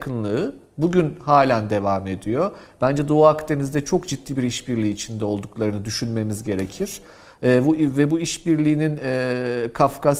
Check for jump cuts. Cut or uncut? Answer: uncut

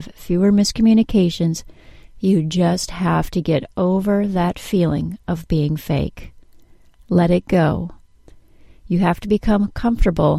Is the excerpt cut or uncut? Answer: uncut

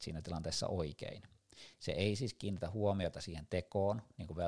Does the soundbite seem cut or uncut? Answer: uncut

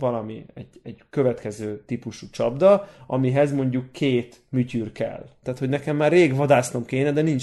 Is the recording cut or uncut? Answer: cut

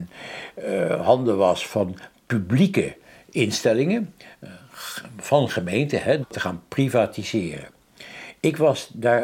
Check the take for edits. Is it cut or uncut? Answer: uncut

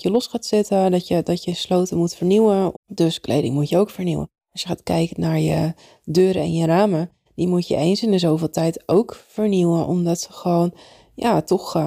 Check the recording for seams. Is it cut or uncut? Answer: cut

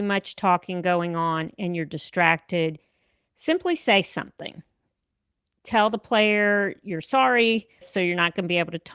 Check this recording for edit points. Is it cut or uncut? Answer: cut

